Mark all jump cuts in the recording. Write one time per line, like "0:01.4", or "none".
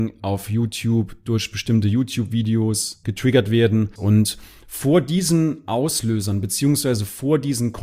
0:04.0

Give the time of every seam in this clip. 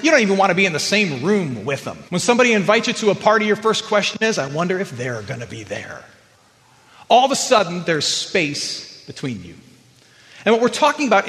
0:02.1

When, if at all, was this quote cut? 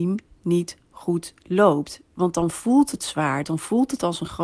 0:03.4

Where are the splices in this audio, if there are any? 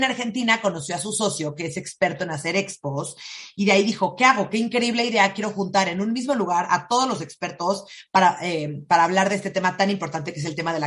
none

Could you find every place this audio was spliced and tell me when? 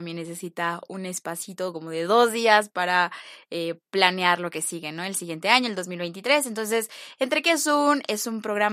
none

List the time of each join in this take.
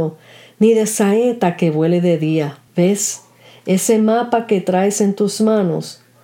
0:02.7

